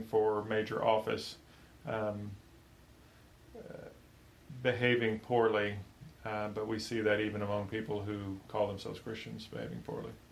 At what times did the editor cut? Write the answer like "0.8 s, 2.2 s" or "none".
none